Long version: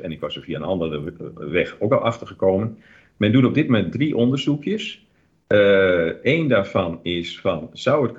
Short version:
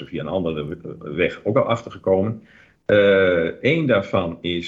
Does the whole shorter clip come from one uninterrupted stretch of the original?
no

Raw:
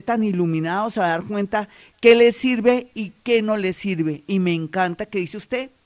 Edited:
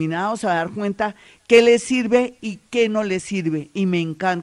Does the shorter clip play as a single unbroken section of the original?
yes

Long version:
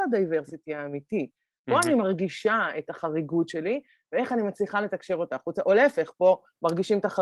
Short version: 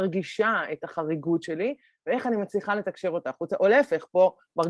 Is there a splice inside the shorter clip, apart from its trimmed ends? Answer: no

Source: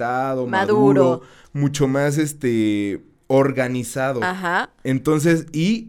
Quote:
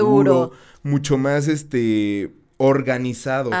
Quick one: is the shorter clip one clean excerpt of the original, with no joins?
yes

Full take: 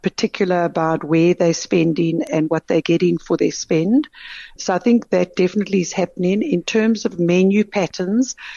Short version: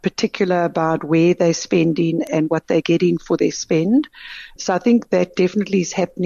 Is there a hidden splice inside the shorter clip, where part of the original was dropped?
no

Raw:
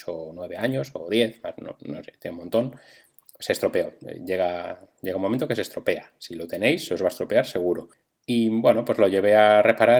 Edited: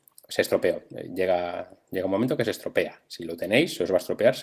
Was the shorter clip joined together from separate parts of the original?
no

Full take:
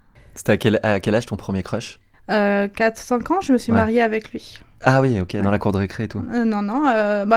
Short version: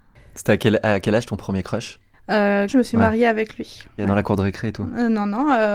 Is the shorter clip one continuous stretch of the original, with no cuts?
no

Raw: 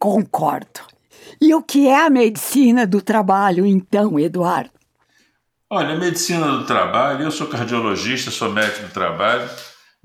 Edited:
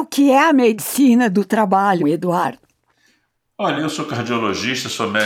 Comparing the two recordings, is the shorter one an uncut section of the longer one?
no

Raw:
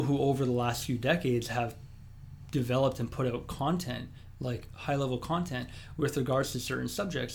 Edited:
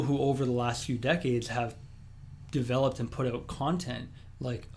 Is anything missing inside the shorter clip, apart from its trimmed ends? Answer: no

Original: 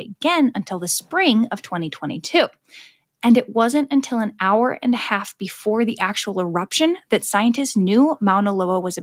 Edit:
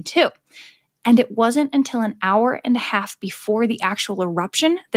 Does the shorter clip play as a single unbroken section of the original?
yes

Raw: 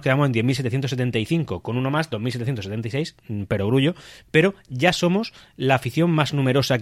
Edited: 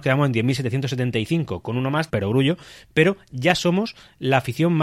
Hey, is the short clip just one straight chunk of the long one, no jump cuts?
no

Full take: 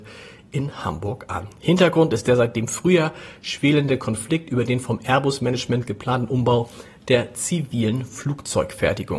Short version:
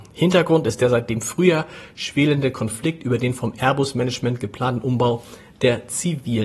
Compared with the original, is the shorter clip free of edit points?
yes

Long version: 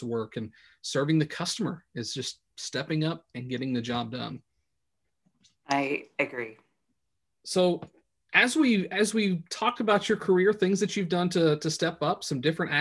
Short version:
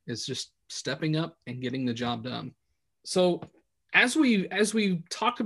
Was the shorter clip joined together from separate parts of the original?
yes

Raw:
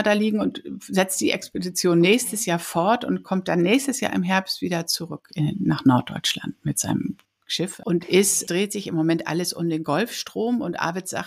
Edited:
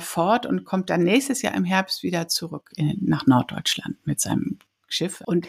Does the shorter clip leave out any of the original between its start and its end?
no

